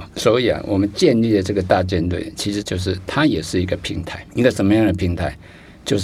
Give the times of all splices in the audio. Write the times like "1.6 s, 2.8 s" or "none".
2.6 s